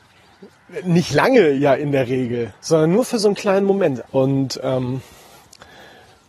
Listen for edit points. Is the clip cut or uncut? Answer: cut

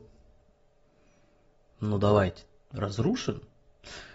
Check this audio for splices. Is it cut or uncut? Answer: uncut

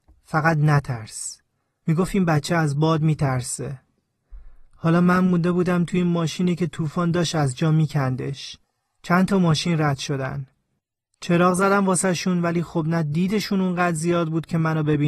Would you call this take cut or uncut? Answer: cut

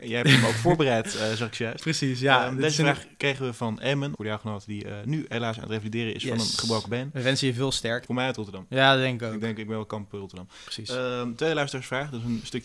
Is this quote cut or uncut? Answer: cut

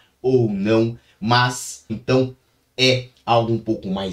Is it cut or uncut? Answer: cut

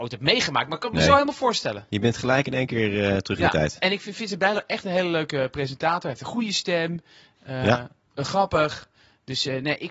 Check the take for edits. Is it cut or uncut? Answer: uncut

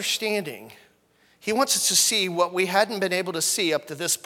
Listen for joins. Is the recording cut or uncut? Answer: uncut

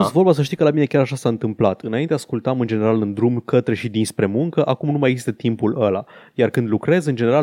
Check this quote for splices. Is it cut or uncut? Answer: uncut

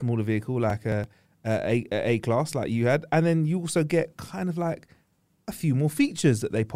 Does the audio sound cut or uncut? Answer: uncut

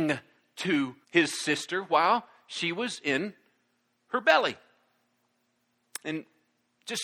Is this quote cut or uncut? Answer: cut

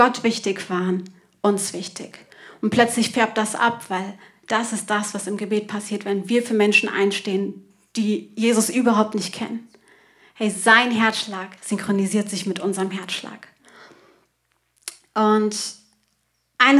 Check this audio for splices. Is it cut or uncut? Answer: uncut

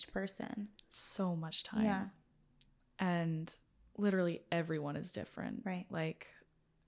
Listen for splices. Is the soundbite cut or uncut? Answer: uncut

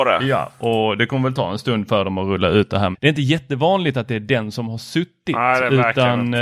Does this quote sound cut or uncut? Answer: cut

